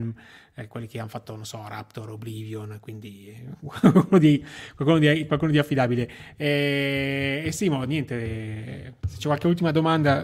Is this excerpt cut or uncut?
uncut